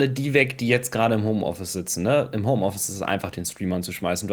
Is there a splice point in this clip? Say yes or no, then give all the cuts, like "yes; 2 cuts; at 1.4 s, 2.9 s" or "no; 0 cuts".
no; 0 cuts